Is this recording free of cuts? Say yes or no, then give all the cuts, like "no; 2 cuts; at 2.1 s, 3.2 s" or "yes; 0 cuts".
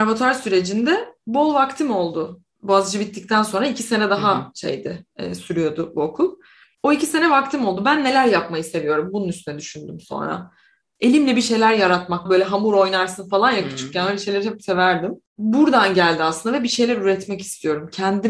no; 2 cuts; at 6.7 s, 12.3 s